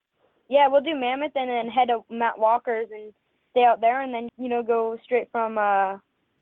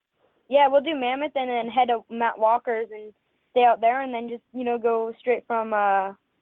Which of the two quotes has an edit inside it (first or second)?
first